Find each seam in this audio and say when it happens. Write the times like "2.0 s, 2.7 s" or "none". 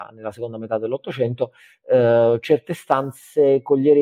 none